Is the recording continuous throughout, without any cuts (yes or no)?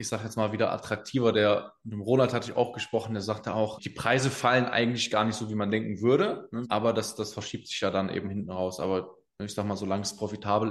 no